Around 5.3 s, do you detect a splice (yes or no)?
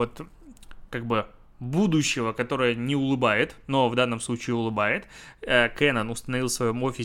no